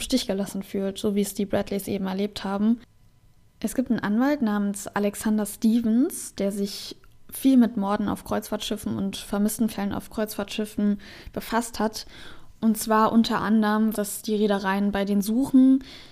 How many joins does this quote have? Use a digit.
2